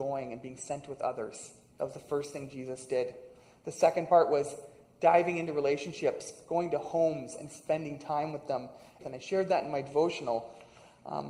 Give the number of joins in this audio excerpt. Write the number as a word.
one